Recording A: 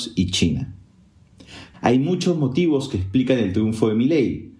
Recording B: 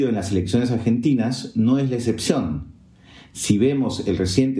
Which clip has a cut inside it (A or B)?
A